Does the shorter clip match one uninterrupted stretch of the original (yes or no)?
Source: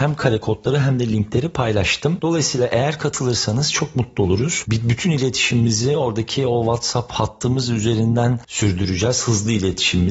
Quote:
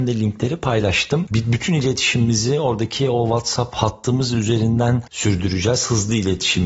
no